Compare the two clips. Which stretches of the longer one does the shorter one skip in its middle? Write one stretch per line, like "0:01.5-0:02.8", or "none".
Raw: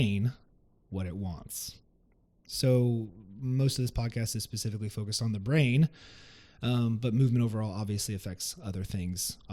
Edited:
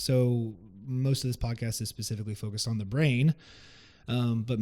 none